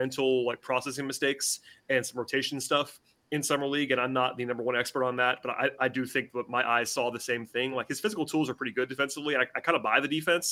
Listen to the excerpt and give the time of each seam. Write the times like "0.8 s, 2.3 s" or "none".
none